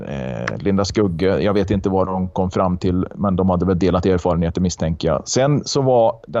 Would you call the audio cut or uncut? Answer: uncut